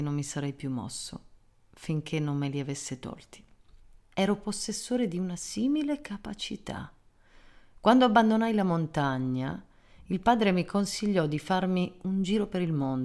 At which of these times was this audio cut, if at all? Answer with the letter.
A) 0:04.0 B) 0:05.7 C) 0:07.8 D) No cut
A